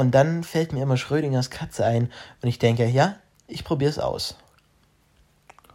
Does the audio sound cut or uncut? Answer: uncut